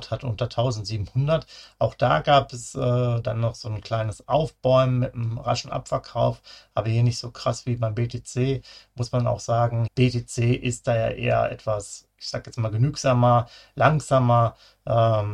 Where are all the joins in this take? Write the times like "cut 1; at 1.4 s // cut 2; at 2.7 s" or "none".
cut 1; at 9.9 s